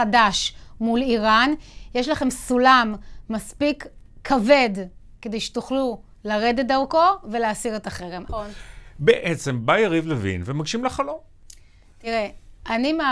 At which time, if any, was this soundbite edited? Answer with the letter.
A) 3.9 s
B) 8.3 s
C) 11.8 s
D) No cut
B